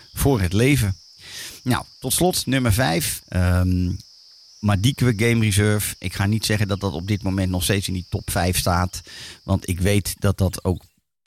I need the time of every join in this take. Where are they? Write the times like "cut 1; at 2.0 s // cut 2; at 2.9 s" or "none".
cut 1; at 3.2 s